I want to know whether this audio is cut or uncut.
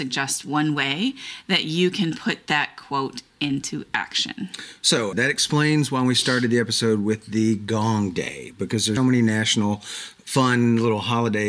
cut